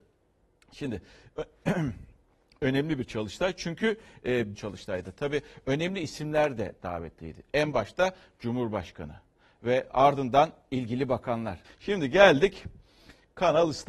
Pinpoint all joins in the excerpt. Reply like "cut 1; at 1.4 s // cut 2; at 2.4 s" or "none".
cut 1; at 4.5 s // cut 2; at 11.6 s